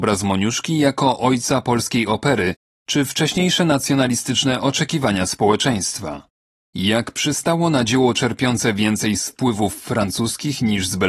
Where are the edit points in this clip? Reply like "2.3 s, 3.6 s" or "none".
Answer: 6.6 s